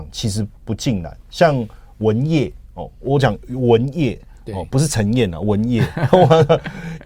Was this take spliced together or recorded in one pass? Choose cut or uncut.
uncut